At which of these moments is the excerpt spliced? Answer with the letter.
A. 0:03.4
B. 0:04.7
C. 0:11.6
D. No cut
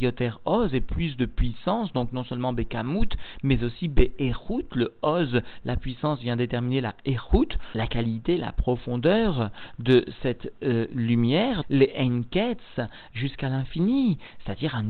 C